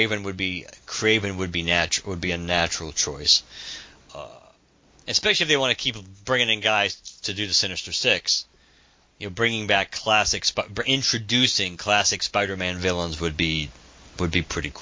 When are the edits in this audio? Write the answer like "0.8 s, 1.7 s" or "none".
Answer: none